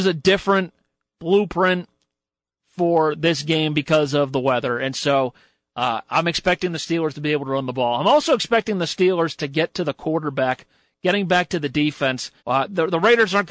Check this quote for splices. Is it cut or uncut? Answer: cut